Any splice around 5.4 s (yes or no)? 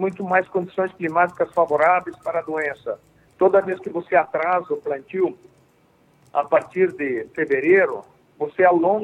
no